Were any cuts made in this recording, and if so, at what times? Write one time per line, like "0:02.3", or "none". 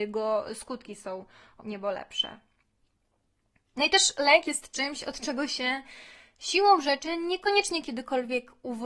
0:01.6